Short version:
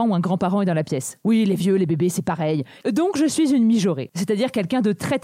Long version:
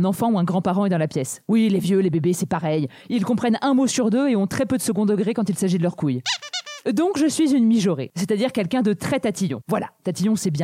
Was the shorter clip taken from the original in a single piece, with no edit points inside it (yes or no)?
no